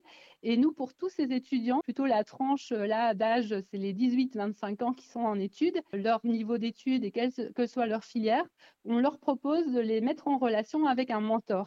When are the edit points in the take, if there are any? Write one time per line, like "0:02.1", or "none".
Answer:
0:01.8
0:05.9